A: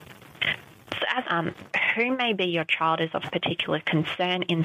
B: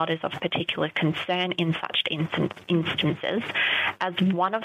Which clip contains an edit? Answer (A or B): A